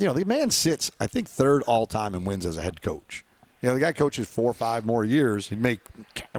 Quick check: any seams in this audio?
no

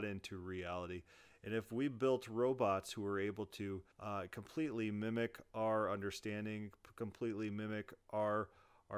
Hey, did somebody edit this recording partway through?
yes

